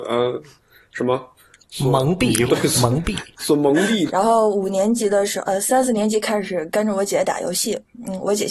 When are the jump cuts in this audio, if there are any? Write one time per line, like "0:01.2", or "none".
0:04.1